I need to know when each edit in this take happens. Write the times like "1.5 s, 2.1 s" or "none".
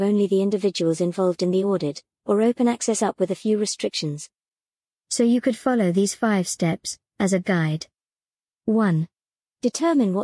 none